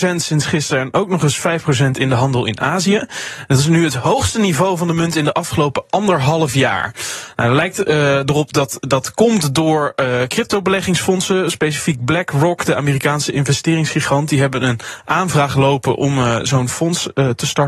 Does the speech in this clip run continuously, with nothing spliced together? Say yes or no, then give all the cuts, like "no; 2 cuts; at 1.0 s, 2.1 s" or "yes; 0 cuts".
yes; 0 cuts